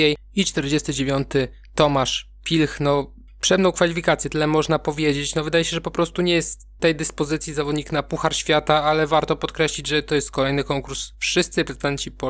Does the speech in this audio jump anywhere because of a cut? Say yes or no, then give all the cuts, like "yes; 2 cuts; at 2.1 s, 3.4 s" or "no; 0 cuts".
no; 0 cuts